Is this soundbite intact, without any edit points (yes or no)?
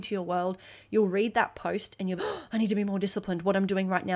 no